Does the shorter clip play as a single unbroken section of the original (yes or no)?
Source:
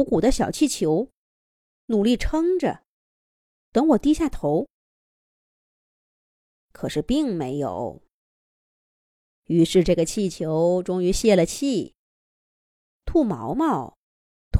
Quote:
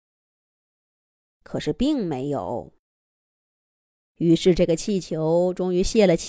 yes